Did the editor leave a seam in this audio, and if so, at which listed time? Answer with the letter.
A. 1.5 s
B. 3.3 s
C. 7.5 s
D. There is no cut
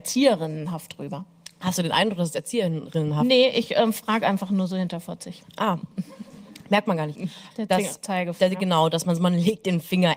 C